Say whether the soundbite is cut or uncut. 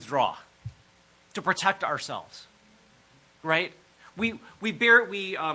uncut